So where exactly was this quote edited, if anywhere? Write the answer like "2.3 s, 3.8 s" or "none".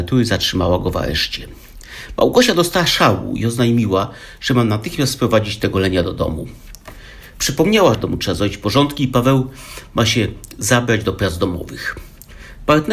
7.9 s